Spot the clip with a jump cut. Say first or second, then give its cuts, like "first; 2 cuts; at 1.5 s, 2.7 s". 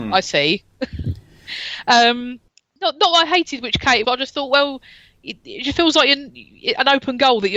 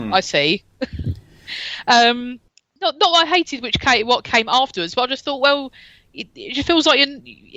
first; 1 cut; at 4.0 s